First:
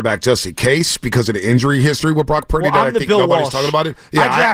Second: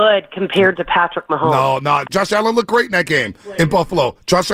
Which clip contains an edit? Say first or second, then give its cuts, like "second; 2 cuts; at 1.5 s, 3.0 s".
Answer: second; 1 cut; at 2.1 s